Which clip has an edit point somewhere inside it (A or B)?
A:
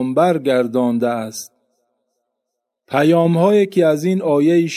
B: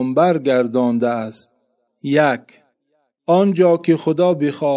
B